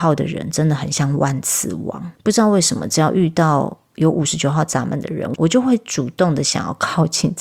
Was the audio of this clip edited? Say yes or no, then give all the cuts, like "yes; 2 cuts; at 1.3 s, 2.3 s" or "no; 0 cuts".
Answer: no; 0 cuts